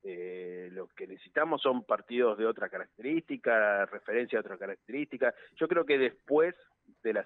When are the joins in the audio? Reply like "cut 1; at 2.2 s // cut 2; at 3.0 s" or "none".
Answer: none